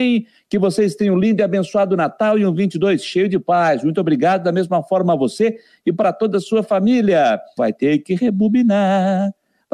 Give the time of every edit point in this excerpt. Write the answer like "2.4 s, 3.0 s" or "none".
7.6 s